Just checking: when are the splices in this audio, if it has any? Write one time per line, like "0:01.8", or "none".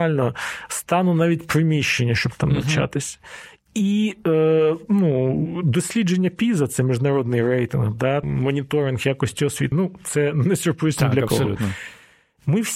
0:08.2
0:09.7